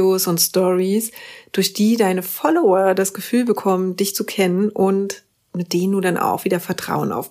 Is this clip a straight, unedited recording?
yes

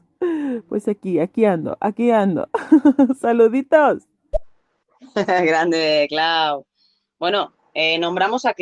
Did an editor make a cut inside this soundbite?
yes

